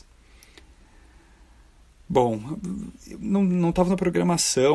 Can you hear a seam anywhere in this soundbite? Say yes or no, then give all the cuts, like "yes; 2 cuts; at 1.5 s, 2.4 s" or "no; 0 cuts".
no; 0 cuts